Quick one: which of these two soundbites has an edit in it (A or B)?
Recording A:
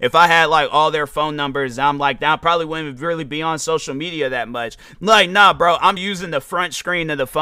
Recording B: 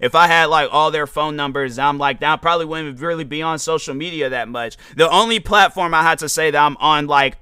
A